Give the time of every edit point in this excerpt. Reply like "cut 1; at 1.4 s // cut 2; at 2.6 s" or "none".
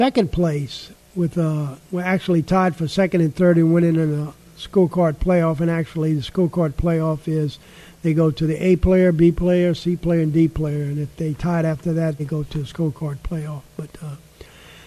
cut 1; at 12.2 s